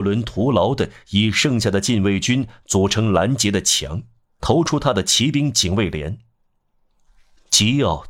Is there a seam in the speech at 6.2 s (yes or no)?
no